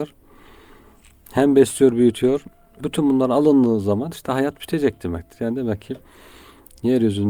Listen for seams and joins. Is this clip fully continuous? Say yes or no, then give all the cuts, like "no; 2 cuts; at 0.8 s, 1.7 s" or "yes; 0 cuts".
no; 1 cut; at 2.8 s